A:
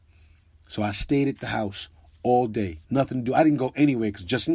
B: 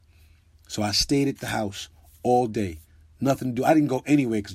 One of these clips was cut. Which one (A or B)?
A